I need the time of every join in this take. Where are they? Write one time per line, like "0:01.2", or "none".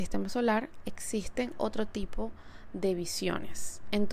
none